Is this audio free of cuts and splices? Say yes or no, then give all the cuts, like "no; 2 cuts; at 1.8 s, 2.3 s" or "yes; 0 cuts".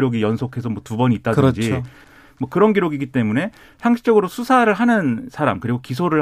no; 1 cut; at 2.0 s